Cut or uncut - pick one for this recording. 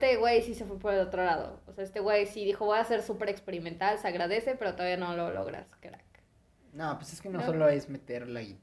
uncut